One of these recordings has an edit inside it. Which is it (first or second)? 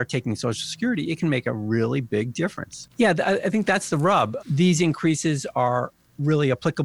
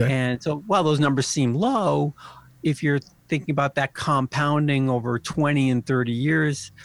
first